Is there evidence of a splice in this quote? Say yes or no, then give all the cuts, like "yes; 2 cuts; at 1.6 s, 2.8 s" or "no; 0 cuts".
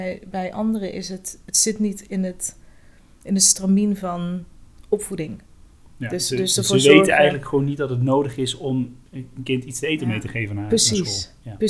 no; 0 cuts